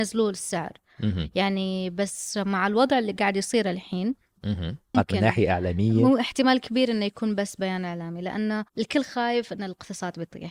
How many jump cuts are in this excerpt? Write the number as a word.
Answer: two